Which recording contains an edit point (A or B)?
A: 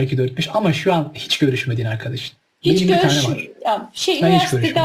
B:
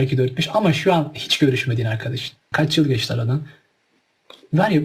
B